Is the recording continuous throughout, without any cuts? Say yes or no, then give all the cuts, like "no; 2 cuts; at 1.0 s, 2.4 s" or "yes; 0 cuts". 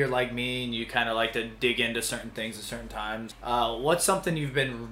no; 1 cut; at 3.3 s